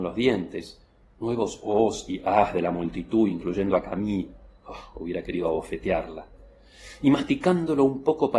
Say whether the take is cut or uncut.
uncut